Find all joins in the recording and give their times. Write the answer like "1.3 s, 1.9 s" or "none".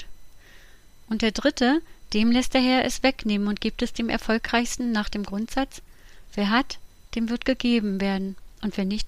2.1 s

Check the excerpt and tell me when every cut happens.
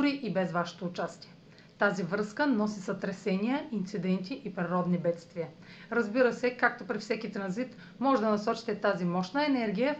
none

